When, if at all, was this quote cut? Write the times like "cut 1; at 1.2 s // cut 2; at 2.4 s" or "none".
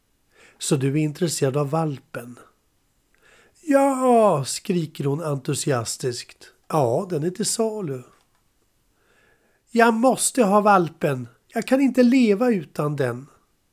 cut 1; at 6.6 s